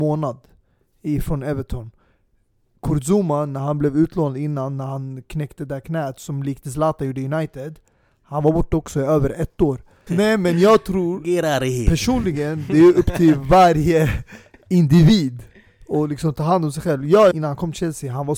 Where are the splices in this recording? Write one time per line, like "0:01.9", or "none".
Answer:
0:10.1
0:17.3